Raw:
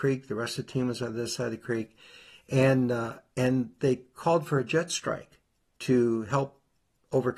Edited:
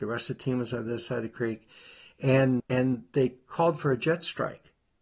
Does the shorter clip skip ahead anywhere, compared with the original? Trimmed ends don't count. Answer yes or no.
yes